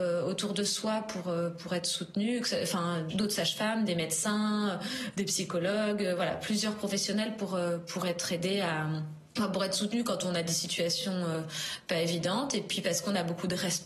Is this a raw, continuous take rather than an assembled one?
yes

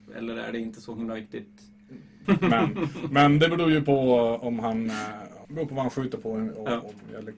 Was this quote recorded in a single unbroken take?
no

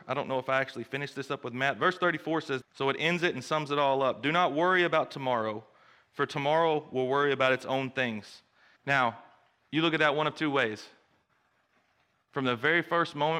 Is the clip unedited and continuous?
no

